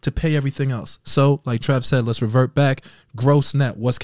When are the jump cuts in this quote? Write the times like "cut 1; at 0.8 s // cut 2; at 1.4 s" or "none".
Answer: none